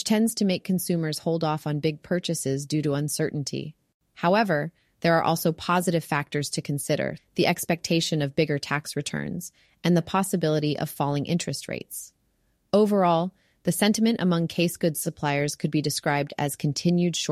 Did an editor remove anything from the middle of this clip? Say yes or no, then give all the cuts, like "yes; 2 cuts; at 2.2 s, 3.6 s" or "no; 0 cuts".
yes; 1 cut; at 7.2 s